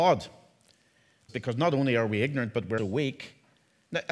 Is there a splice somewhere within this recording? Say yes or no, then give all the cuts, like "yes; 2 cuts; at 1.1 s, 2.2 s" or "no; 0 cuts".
yes; 2 cuts; at 1.3 s, 2.8 s